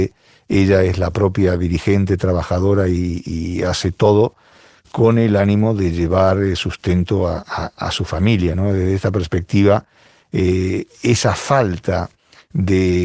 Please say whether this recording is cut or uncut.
uncut